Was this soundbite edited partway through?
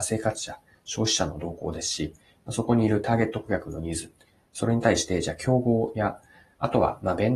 no; 0 cuts

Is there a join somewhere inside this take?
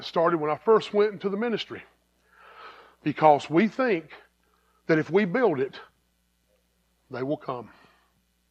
yes; 1 cut; at 2.9 s

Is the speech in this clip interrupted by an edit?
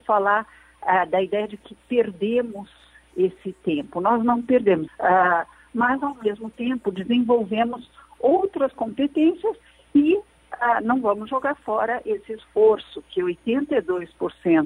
yes; 1 cut; at 4.9 s

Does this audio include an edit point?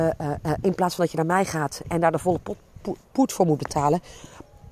yes; 1 cut; at 1.8 s

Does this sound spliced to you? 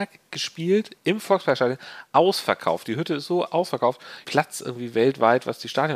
yes; 1 cut; at 4.2 s

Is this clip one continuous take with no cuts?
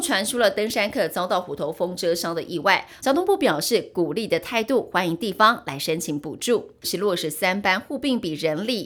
no; 2 cuts; at 3.0 s, 6.8 s

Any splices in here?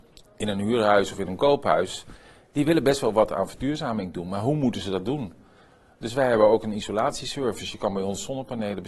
no; 0 cuts

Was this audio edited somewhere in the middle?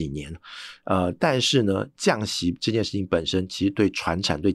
no; 0 cuts

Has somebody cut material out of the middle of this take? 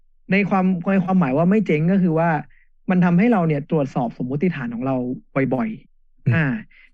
yes; 1 cut; at 5.9 s

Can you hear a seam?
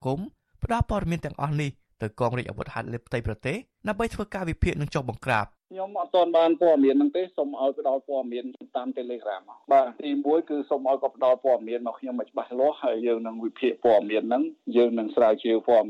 yes; 2 cuts; at 9.9 s, 13.0 s

